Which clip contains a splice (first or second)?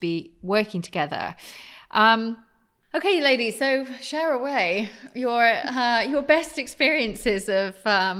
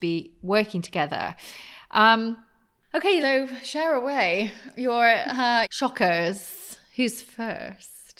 second